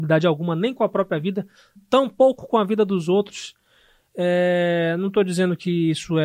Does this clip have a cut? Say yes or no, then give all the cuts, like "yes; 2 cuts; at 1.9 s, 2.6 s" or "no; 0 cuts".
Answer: no; 0 cuts